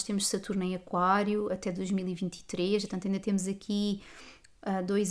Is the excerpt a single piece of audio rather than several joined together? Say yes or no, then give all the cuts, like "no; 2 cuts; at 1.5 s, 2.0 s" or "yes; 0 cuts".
no; 1 cut; at 2.9 s